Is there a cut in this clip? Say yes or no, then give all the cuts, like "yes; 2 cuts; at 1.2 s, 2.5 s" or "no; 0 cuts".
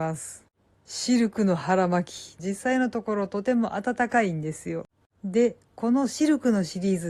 yes; 2 cuts; at 2.4 s, 5.0 s